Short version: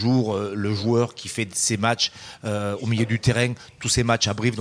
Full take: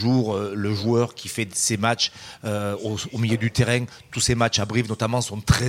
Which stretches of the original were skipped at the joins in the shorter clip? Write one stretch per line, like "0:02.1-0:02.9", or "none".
0:02.8-0:03.1

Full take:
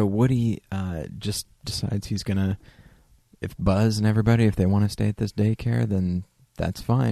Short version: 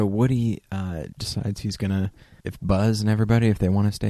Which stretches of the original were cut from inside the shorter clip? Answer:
0:01.1-0:01.6
0:02.9-0:03.4

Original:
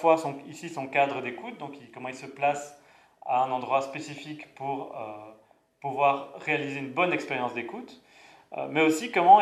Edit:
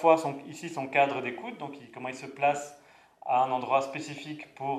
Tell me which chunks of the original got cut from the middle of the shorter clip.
none

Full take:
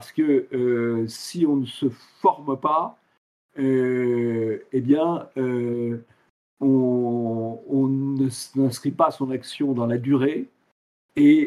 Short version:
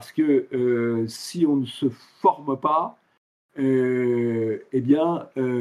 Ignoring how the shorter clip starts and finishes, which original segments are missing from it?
none

